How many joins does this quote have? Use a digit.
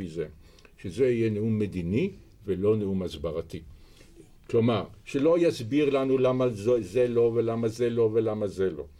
0